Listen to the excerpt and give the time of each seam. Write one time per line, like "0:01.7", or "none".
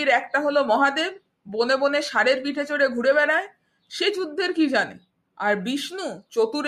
none